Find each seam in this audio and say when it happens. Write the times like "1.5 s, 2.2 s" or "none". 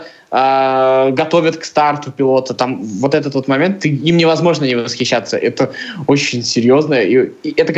none